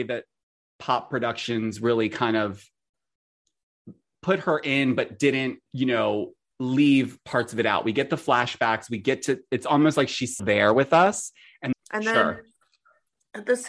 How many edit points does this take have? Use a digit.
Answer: 3